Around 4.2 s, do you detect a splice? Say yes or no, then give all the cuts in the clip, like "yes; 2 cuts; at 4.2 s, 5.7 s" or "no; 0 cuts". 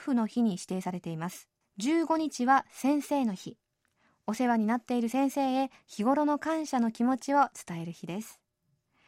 no; 1 cut; at 1.6 s